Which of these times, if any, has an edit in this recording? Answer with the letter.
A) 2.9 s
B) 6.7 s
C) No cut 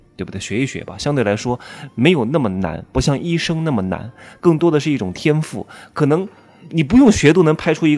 B